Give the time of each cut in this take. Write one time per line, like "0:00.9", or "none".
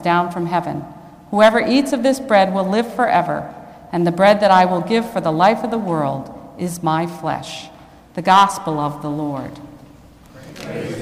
none